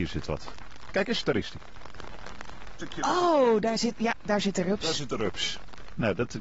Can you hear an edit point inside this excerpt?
no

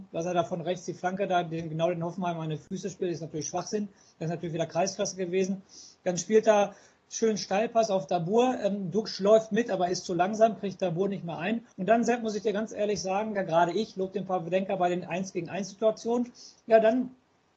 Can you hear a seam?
yes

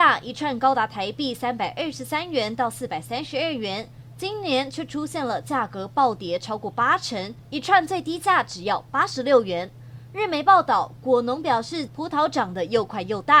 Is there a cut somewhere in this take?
yes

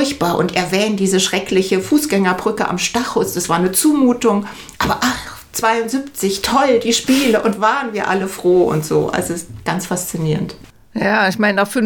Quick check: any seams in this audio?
no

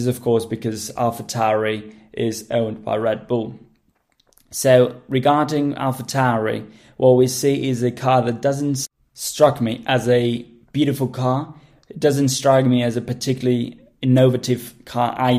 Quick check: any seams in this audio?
no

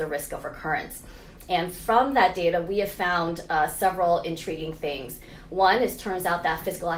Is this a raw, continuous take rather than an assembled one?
yes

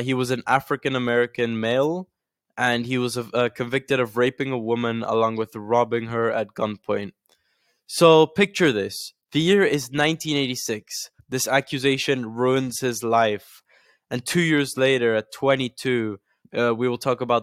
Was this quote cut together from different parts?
yes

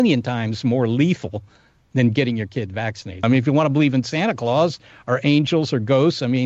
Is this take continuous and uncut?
no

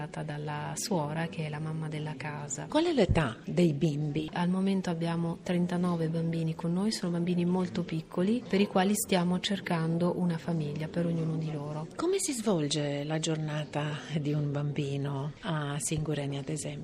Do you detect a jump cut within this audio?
yes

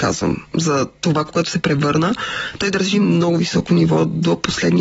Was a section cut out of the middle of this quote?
yes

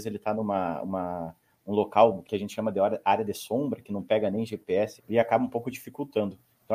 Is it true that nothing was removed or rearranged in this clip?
no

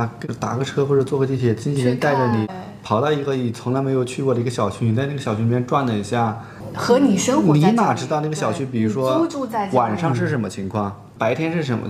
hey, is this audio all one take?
yes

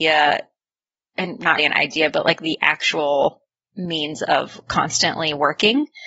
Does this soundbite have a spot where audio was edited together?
yes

